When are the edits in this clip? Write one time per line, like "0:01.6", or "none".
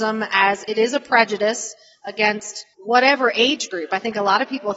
0:02.7